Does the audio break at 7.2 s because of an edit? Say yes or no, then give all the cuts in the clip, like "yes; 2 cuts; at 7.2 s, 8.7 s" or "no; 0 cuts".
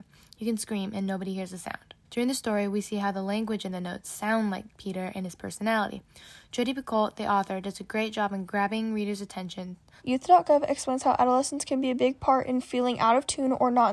no; 2 cuts; at 2.0 s, 10.0 s